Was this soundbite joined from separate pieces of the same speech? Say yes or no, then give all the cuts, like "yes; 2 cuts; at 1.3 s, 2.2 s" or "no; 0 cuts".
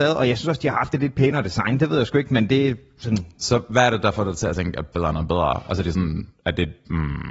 no; 0 cuts